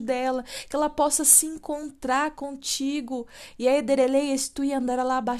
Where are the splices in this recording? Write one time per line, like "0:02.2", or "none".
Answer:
none